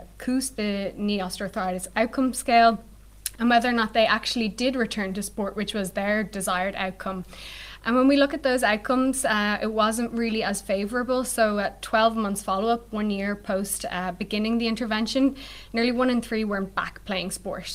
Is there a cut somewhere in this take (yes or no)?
no